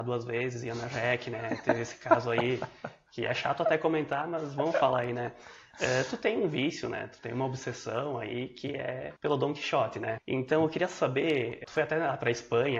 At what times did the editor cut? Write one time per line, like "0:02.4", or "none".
0:09.2